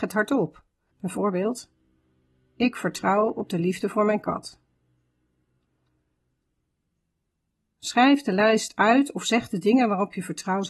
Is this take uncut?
no; 1 cut; at 0.9 s

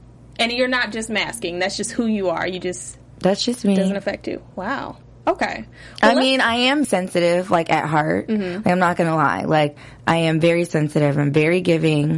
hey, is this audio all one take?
no; 1 cut; at 6.8 s

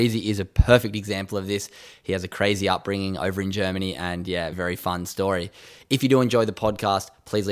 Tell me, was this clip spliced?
yes; 1 cut; at 4.5 s

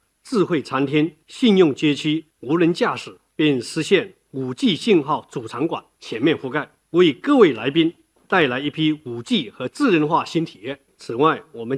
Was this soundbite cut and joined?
yes; 1 cut; at 3.3 s

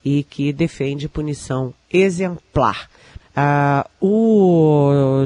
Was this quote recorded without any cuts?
no; 1 cut; at 3.2 s

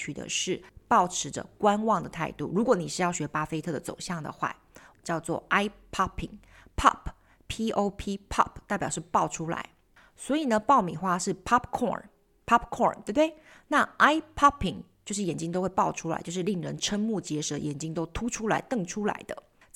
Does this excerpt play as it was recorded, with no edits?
no; 1 cut; at 4.9 s

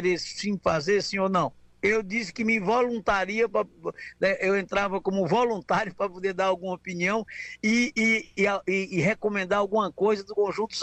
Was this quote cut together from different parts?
no; 0 cuts

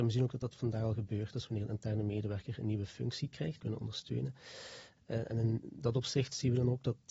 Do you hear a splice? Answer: yes; 3 cuts; at 1.3 s, 3.6 s, 5.0 s

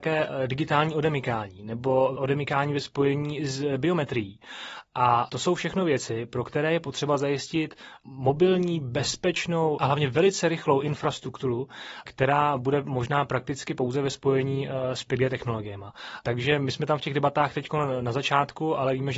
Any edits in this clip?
no; 0 cuts

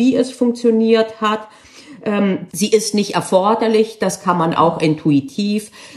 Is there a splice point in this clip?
yes; 1 cut; at 2.5 s

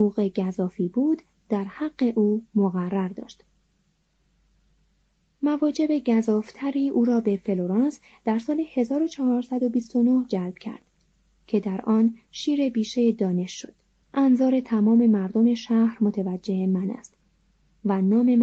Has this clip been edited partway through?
yes; 1 cut; at 14.0 s

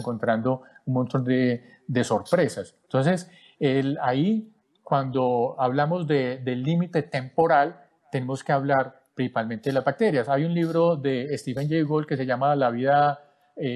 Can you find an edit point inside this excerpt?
no; 0 cuts

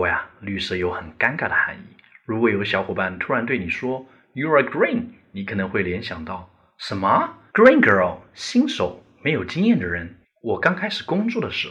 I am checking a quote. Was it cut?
yes; 2 cuts; at 7.5 s, 10.2 s

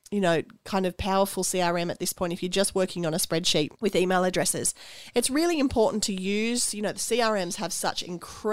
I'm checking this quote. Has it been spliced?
yes; 2 cuts; at 3.8 s, 5.1 s

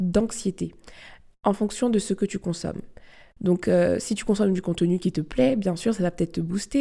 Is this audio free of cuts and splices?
yes; 0 cuts

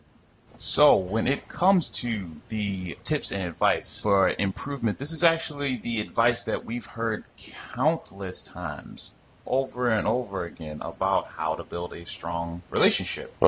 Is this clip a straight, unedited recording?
yes; 0 cuts

